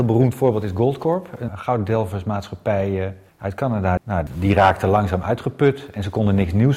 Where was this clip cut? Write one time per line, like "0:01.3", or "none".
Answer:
0:01.5
0:04.0